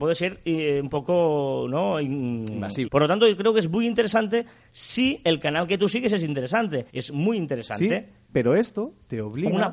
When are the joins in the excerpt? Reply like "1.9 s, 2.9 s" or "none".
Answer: 2.8 s, 6.9 s